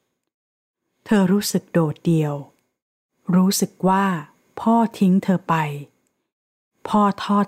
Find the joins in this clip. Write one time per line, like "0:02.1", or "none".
none